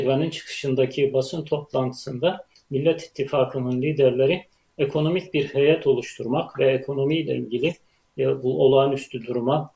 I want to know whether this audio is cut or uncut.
uncut